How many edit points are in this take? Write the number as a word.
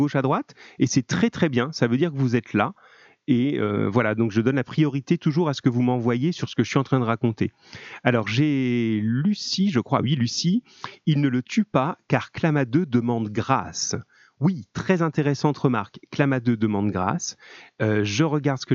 zero